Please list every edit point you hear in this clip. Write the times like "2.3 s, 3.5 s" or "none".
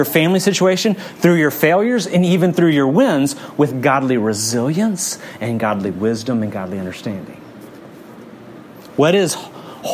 none